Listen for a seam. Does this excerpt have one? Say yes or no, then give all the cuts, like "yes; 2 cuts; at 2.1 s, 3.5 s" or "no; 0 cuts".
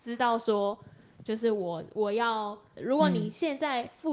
yes; 1 cut; at 2.8 s